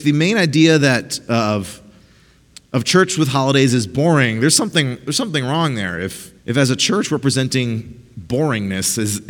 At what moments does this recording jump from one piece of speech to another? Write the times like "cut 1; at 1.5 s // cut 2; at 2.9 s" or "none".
cut 1; at 6.4 s